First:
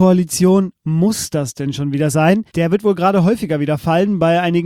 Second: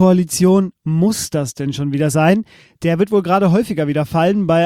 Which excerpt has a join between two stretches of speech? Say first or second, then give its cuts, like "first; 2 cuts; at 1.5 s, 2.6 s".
first; 1 cut; at 2.5 s